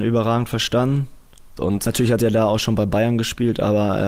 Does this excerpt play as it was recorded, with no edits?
no; 1 cut; at 1.6 s

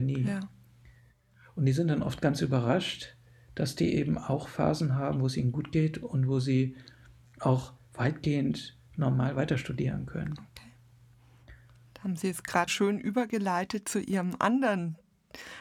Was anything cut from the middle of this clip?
yes; 1 cut; at 12.7 s

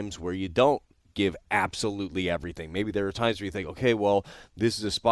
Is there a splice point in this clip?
no; 0 cuts

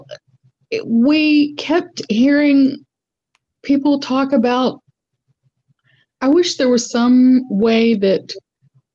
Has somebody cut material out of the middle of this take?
no; 0 cuts

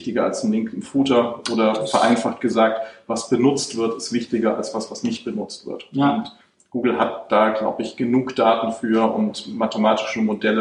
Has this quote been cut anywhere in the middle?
no; 0 cuts

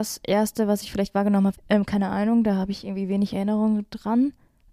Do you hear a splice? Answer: yes; 1 cut; at 1.5 s

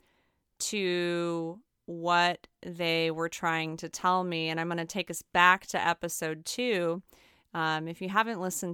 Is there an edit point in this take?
no; 0 cuts

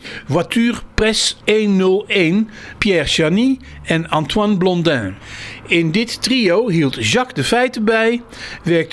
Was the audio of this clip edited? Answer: yes; 1 cut; at 2.8 s

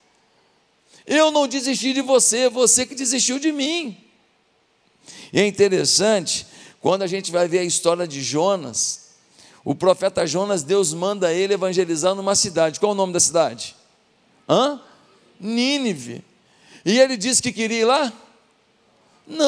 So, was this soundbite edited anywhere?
no; 0 cuts

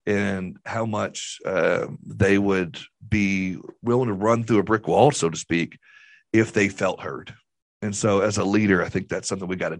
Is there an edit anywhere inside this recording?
no; 0 cuts

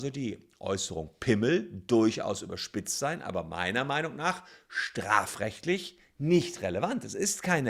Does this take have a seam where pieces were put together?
no; 0 cuts

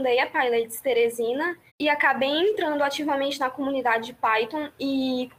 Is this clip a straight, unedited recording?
no; 1 cut; at 1.7 s

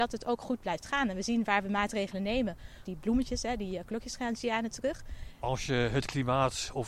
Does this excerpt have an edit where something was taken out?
yes; 2 cuts; at 2.8 s, 5.4 s

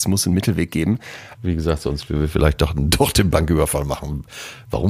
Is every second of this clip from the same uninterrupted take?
no; 1 cut; at 1.3 s

